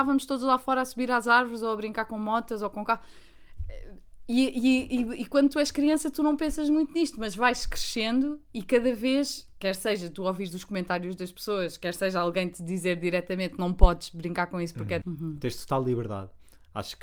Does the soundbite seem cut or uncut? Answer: cut